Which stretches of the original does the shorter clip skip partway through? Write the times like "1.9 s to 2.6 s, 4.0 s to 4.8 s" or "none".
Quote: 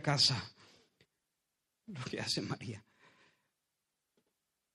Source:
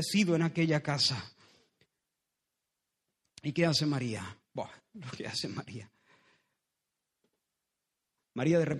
2.6 s to 4.9 s